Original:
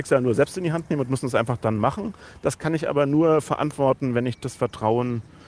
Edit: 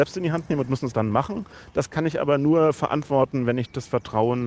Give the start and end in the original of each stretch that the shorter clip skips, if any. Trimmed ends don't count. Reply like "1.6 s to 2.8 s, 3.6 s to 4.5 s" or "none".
1.3 s to 1.6 s